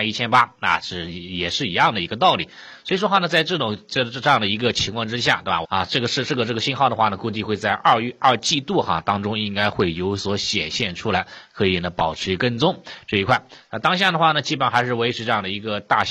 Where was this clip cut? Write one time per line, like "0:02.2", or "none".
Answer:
0:05.6